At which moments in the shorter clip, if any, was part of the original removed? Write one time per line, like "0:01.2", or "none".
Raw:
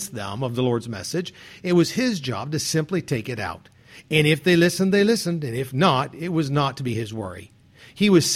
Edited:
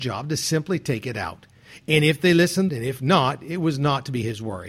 0:02.7